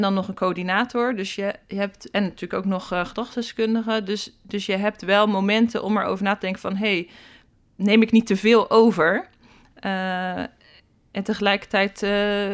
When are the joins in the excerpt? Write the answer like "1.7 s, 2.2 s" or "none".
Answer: none